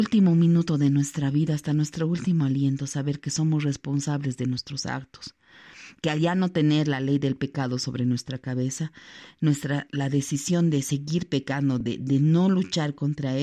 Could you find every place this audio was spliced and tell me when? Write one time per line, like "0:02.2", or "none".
none